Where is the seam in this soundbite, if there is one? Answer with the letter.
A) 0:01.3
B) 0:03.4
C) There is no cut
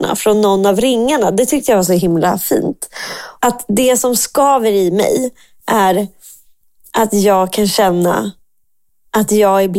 B